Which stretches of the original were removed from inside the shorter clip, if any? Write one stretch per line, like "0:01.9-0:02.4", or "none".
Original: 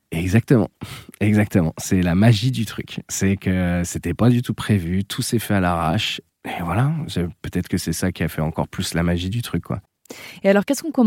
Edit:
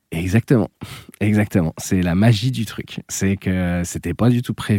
none